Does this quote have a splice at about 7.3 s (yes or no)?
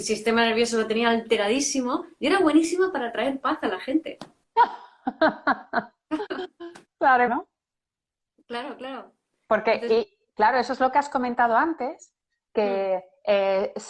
yes